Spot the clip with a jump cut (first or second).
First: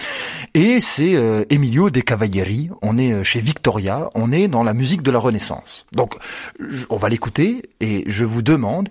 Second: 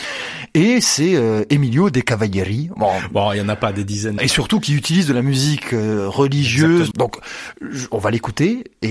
second